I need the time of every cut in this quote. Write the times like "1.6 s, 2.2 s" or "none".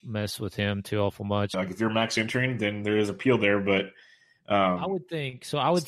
1.5 s